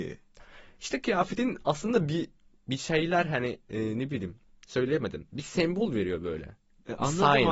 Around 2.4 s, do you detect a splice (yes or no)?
no